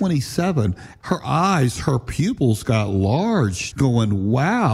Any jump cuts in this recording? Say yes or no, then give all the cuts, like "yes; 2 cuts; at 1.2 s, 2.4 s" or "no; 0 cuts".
yes; 2 cuts; at 1.0 s, 3.7 s